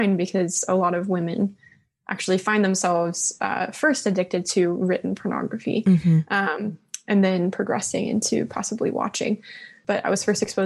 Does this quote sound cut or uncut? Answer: uncut